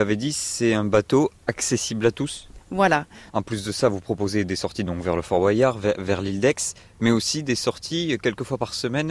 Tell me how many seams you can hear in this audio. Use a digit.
1